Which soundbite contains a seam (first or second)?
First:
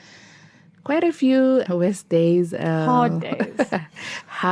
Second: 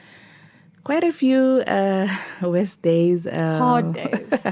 first